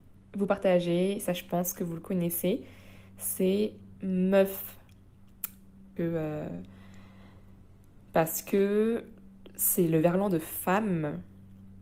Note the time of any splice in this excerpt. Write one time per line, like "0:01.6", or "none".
0:06.0

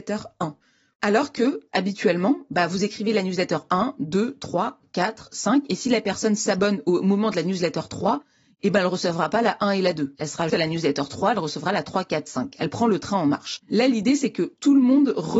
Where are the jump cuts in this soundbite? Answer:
0:10.5
0:13.6

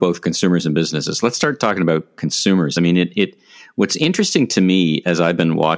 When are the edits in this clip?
none

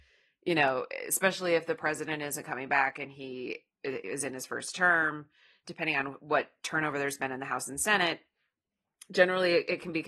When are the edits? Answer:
none

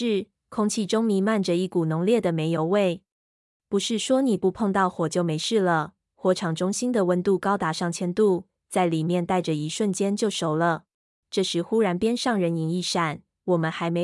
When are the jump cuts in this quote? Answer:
0:03.6
0:11.2

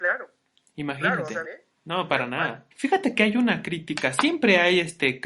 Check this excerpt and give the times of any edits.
0:01.4
0:02.7

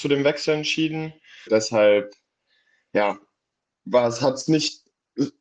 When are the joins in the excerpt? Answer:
0:01.5

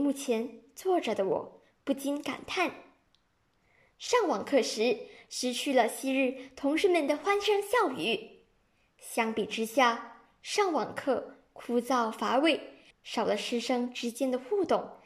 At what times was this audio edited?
0:12.9

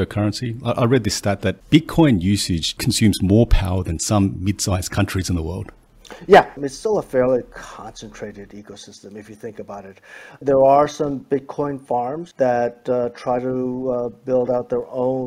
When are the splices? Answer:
0:06.6

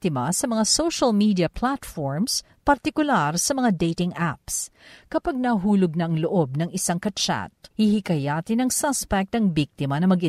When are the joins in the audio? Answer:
0:07.7

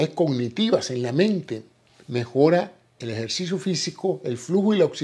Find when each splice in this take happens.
none

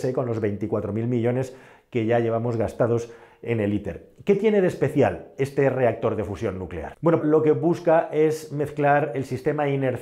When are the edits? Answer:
0:07.2

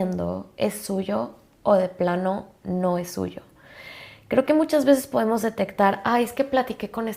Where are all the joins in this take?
none

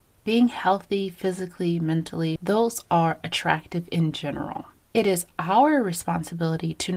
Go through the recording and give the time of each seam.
0:02.4
0:04.9

